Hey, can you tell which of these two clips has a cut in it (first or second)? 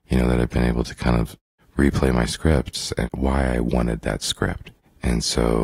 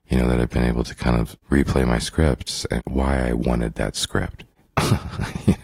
second